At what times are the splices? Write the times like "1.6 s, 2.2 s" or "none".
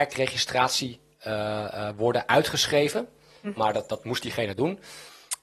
3.6 s